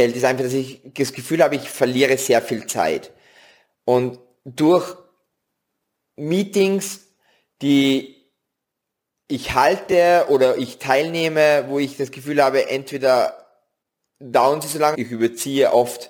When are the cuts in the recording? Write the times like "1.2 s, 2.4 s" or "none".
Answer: 14.9 s